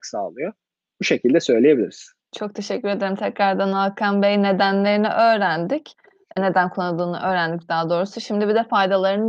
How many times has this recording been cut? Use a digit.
2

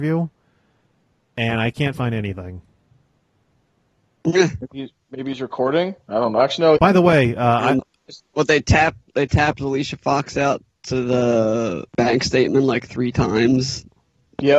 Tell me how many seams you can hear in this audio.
3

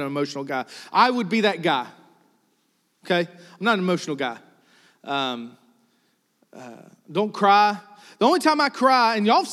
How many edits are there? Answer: 0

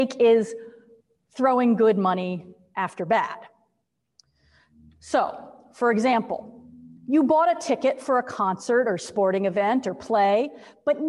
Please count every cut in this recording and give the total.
1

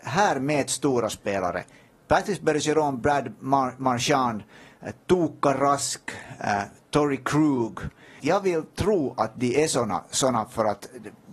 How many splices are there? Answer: 1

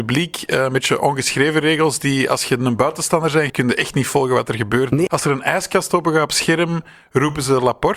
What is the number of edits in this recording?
2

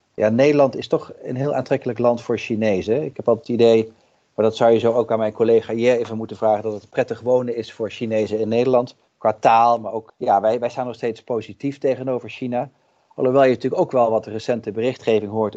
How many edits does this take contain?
1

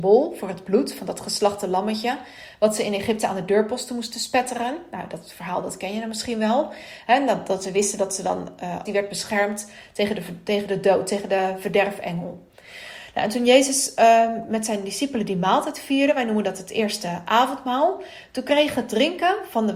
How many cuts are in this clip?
1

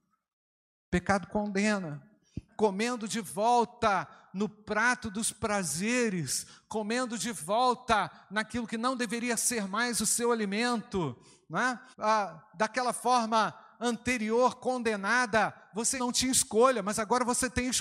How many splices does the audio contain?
3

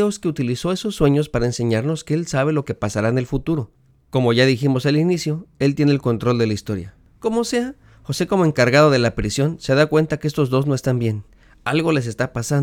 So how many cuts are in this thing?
0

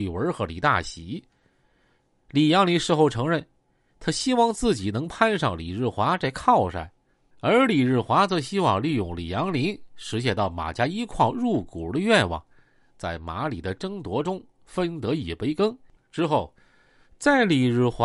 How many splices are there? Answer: 0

